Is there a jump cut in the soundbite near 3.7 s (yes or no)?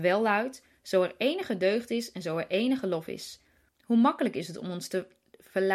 yes